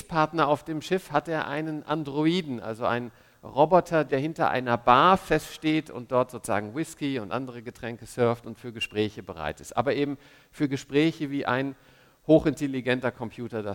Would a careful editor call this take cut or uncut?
cut